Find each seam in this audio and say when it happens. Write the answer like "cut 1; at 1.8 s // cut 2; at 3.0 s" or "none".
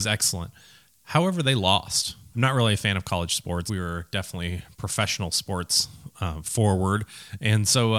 cut 1; at 2.3 s // cut 2; at 3.7 s